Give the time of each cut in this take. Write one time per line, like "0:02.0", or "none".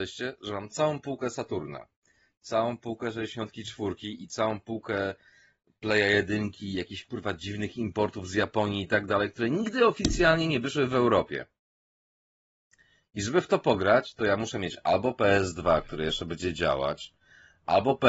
none

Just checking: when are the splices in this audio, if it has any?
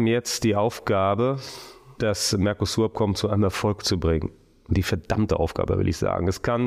none

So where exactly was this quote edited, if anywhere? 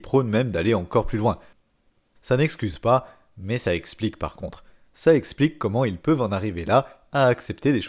none

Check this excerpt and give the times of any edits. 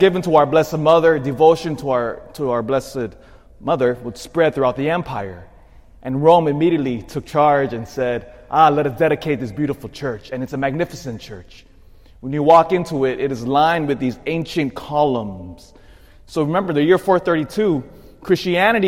none

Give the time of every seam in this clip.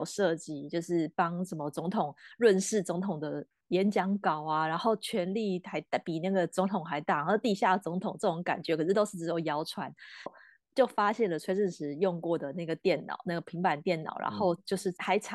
0:10.3

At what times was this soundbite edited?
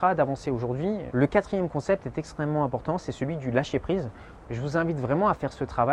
0:01.1
0:04.4

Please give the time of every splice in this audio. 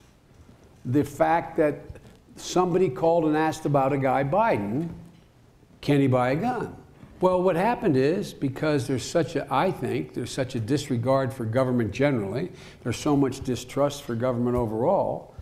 0:07.1

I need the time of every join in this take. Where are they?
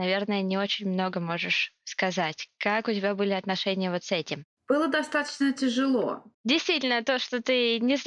0:06.3

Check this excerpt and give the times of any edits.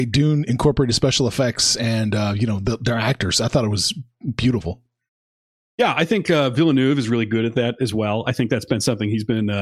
none

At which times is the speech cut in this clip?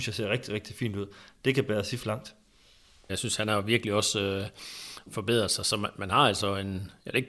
0:03.1

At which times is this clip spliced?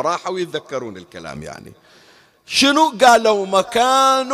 none

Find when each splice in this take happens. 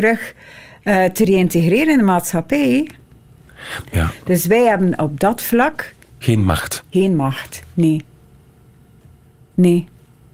0:03.8

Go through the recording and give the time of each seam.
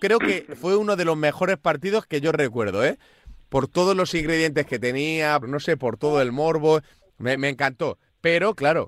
0:05.4
0:07.4

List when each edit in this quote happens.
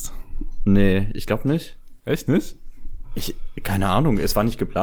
none

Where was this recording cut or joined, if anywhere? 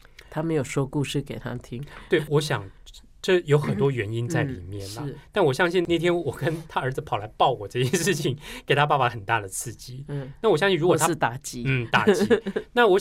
none

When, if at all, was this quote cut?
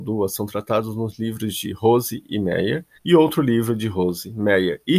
0:03.0

